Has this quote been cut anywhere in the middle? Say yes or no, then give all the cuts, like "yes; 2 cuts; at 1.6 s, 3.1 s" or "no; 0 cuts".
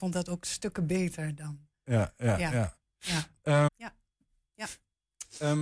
yes; 1 cut; at 3.7 s